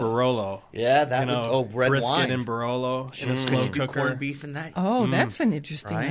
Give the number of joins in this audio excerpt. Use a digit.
1